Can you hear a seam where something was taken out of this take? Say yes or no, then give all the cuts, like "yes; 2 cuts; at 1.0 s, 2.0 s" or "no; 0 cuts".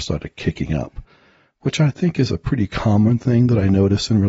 no; 0 cuts